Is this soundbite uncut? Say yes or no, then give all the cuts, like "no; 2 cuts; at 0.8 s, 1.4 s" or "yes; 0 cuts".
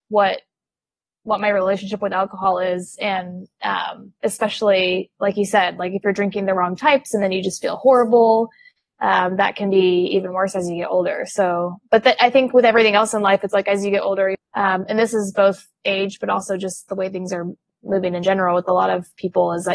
no; 1 cut; at 14.3 s